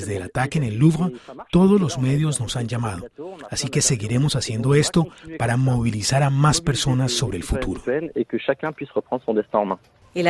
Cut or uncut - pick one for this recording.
uncut